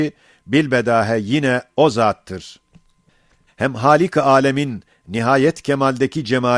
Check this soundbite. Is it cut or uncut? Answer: cut